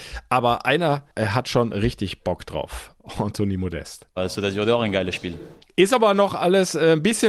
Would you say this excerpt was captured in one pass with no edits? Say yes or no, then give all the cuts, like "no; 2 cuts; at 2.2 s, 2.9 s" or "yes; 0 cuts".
no; 2 cuts; at 4.2 s, 5.6 s